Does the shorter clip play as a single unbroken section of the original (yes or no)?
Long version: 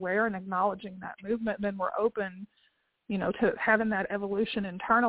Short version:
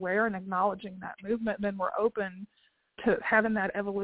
no